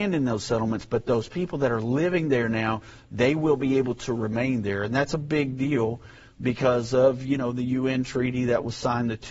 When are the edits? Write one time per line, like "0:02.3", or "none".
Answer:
none